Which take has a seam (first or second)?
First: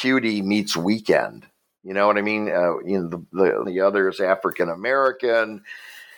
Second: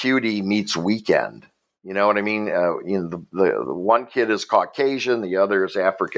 first